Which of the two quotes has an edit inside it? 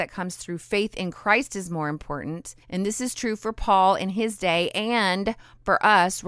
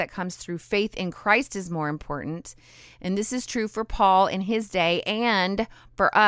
first; 1 cut; at 2.6 s

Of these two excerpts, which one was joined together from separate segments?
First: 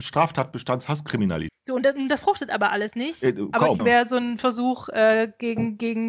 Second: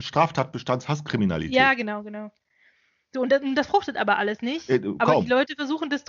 first; 2 cuts; at 1.5 s, 3.8 s

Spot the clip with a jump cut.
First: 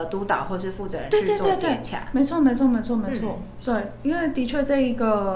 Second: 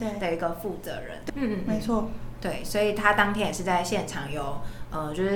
second; 1 cut; at 1.3 s

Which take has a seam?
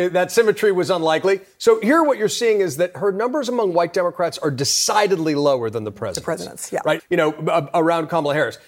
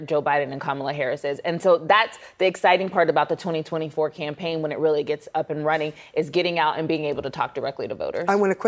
first; 1 cut; at 7.0 s

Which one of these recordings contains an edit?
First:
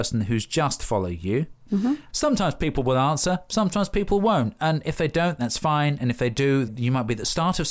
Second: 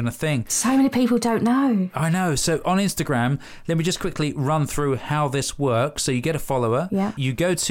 first; 2 cuts; at 2.1 s, 6.7 s

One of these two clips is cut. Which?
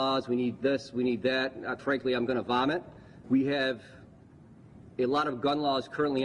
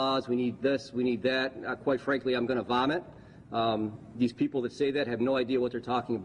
first; 2 cuts; at 1.8 s, 3.2 s

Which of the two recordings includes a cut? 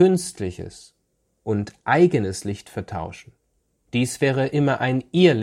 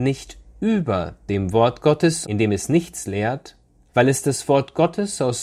second; 2 cuts; at 2.2 s, 3.9 s

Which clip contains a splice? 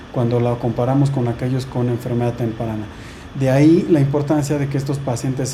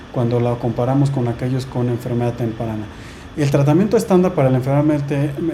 second; 1 cut; at 3.3 s

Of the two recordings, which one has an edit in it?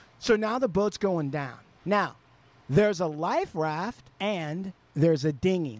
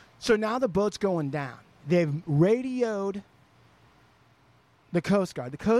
first; 2 cuts; at 1.8 s, 4.1 s

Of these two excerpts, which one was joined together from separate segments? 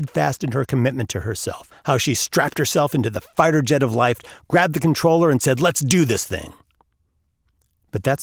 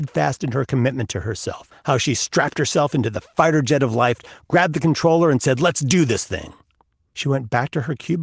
second; 1 cut; at 7.1 s

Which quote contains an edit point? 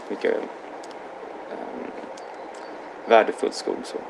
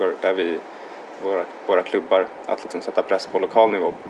second; 1 cut; at 1.2 s

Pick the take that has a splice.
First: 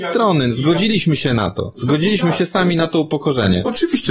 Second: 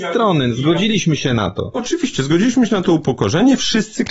second; 1 cut; at 1.7 s

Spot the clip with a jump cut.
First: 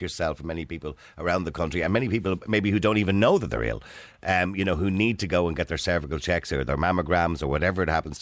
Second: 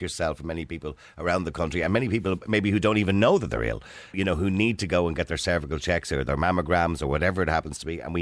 second; 1 cut; at 4.1 s

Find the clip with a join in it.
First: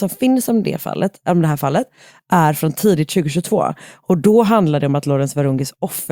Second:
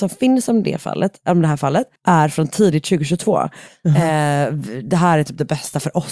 second; 2 cuts; at 2.0 s, 3.7 s

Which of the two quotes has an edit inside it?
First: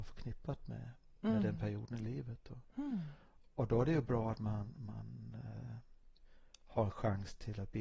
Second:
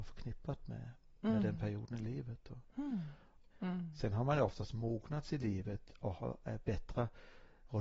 second; 1 cut; at 3.5 s

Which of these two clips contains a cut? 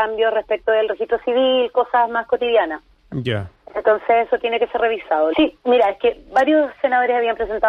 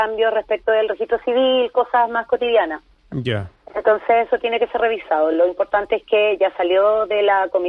first; 1 cut; at 5.3 s

